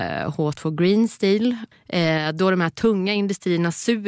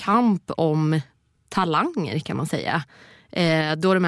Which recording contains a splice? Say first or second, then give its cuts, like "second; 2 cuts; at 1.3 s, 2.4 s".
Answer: first; 1 cut; at 1.7 s